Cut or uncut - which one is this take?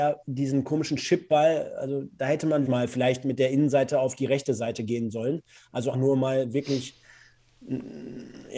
cut